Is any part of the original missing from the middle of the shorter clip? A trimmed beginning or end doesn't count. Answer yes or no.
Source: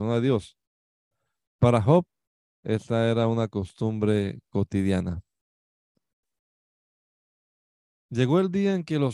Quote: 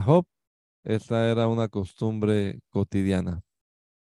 no